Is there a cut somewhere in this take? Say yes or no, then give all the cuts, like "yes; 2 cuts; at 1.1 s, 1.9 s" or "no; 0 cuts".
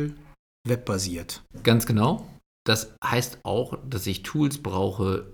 no; 0 cuts